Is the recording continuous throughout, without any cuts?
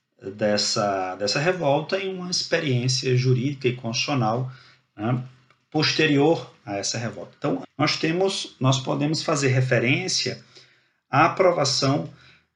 no; 1 cut; at 7.6 s

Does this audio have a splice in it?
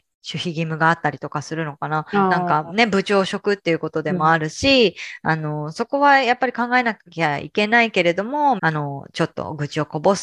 yes; 1 cut; at 8.6 s

